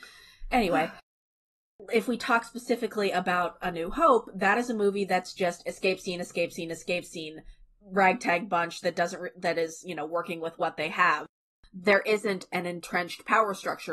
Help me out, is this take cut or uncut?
uncut